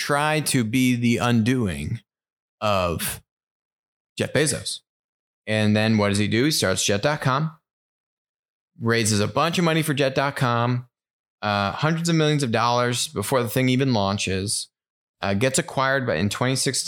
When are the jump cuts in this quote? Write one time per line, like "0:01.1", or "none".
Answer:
none